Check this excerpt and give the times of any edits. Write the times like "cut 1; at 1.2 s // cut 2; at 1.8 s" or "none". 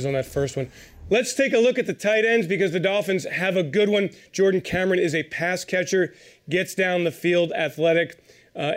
none